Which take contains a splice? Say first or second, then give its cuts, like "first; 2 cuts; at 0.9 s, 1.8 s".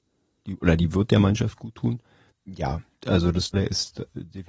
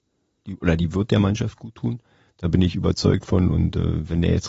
first; 2 cuts; at 2.3 s, 3.5 s